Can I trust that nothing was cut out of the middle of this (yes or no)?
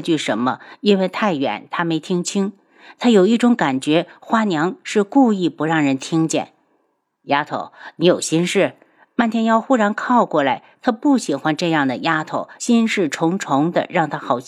yes